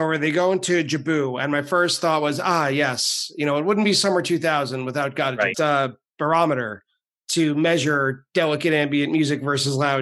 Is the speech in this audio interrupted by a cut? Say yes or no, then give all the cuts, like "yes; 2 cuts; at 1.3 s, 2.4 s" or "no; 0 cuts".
yes; 1 cut; at 5.5 s